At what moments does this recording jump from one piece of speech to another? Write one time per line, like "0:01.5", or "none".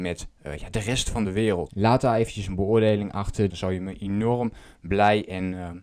0:01.7
0:03.5